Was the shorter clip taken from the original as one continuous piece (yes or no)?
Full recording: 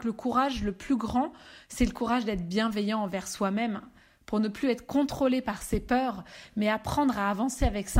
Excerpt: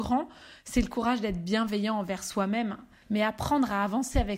no